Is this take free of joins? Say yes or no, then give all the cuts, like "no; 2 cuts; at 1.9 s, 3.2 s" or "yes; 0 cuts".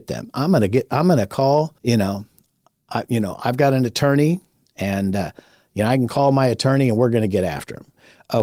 no; 1 cut; at 1.8 s